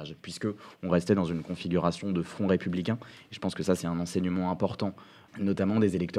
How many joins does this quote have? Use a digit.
1